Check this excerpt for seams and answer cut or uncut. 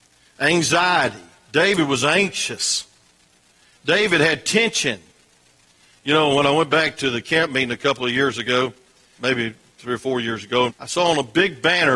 cut